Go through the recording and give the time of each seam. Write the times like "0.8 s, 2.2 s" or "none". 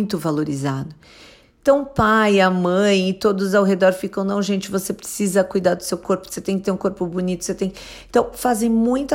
none

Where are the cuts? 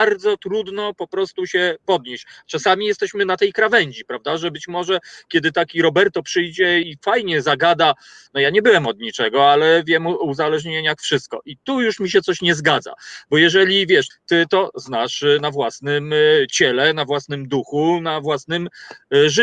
6.8 s, 8.3 s, 14.1 s

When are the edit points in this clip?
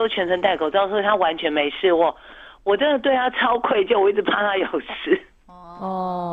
none

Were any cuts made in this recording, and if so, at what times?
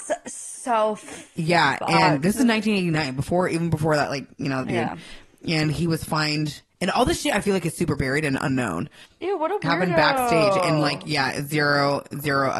4.6 s, 9.1 s

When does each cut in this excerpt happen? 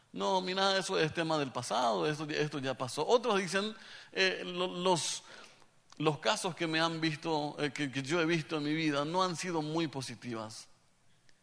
none

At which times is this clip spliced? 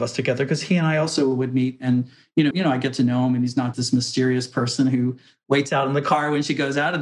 2.5 s, 3.7 s

